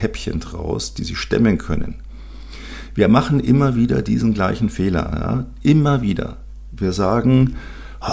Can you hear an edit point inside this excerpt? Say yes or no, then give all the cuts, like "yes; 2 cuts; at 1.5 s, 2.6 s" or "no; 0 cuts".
no; 0 cuts